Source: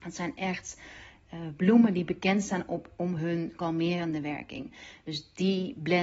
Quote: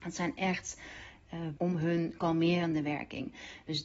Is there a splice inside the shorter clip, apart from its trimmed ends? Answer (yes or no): yes